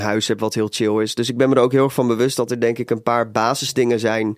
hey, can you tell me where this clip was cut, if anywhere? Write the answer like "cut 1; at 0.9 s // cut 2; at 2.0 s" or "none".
none